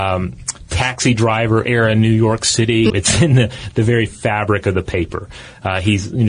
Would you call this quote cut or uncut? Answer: cut